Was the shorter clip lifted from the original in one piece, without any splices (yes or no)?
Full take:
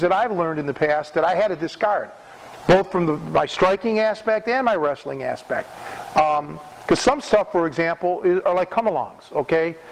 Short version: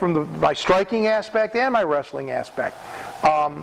yes